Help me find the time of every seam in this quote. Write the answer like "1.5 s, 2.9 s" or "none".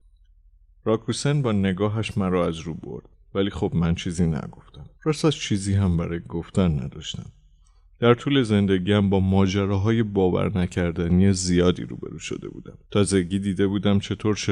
4.9 s, 12.8 s